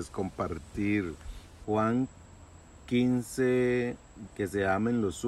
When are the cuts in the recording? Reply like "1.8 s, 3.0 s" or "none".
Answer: 1.6 s, 4.3 s

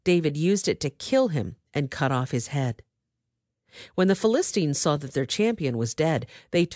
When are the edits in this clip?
none

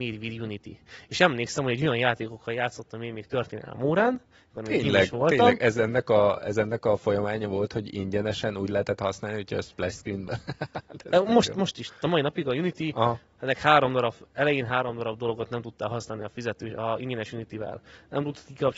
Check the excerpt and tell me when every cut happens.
none

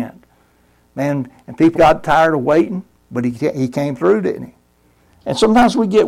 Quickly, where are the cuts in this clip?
1.7 s

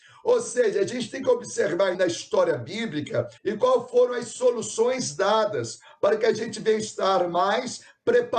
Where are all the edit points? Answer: 1.9 s, 3.4 s

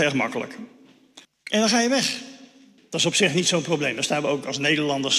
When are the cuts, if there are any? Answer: 1.2 s, 2.8 s

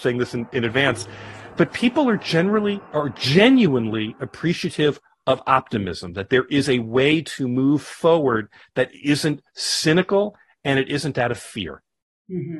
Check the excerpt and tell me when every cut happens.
2.8 s

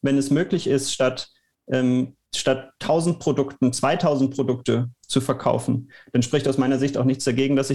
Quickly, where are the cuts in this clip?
2.2 s

